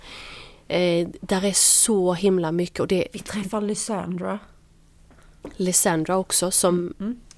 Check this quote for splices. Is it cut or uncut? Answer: uncut